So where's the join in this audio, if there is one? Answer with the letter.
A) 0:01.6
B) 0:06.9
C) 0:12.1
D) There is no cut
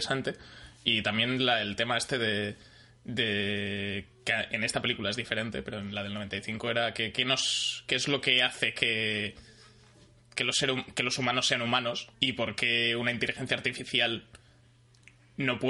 C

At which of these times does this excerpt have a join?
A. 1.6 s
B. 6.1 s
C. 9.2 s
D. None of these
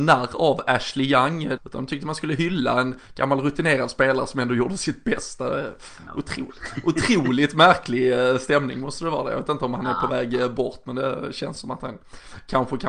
A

